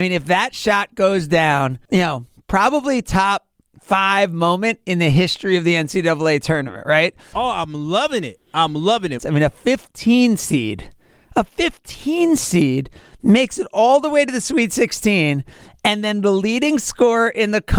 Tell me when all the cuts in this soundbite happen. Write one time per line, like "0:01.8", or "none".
0:01.9
0:07.3
0:09.2